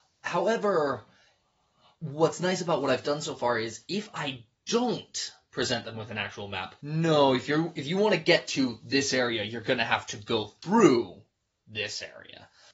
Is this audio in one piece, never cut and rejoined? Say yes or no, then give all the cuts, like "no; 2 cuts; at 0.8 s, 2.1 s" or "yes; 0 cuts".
no; 1 cut; at 6.8 s